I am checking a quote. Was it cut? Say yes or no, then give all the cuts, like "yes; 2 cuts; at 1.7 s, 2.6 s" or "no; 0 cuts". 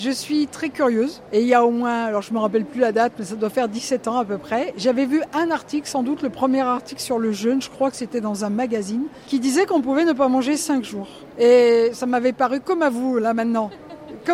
no; 0 cuts